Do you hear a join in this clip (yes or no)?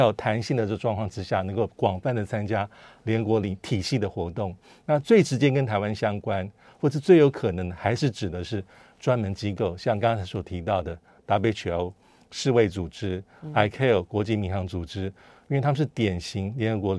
no